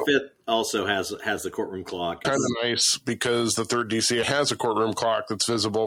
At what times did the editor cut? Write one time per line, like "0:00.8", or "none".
0:02.2
0:04.2